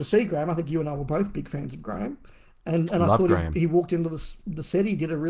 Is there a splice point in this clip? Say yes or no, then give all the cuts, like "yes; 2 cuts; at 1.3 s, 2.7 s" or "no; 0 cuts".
no; 0 cuts